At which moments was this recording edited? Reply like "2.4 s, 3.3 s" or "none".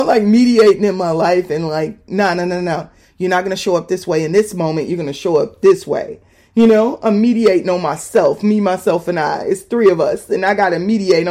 none